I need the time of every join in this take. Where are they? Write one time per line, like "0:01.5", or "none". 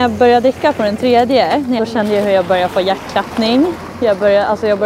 0:01.8